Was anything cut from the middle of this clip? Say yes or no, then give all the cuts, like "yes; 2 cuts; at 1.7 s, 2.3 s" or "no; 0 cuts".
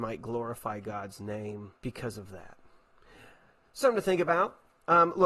yes; 2 cuts; at 1.8 s, 3.8 s